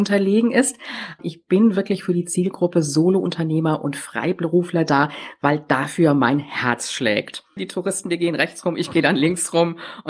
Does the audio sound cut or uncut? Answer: cut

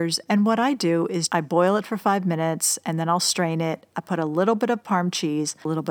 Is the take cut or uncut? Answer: cut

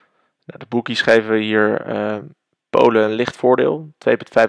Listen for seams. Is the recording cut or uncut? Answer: uncut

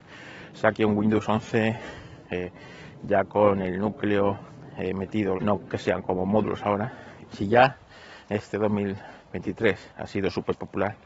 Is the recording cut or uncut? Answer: cut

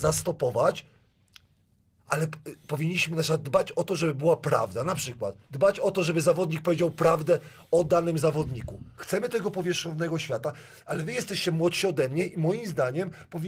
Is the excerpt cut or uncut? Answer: cut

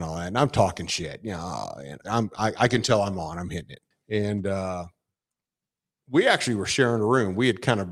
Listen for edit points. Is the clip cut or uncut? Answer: cut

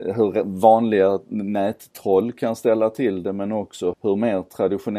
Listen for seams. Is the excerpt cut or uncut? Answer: cut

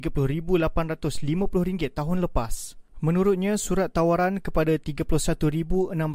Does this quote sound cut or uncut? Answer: cut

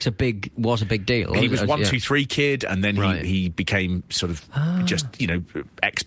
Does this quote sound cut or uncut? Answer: uncut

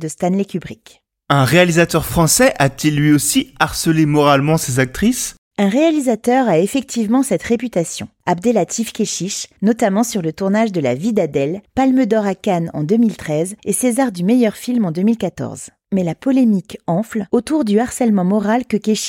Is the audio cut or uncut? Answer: cut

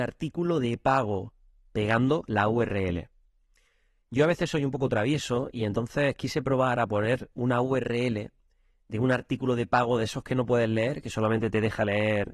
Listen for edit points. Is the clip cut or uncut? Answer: uncut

